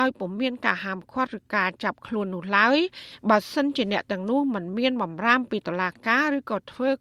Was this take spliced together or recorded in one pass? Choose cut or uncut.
uncut